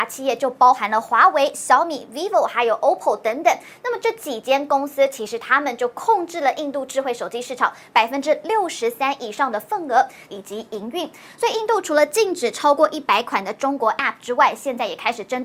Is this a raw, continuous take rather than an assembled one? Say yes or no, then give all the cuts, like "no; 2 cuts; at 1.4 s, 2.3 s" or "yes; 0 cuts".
no; 1 cut; at 10.3 s